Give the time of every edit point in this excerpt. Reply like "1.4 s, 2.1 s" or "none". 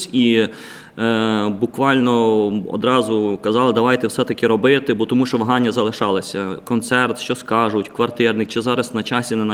none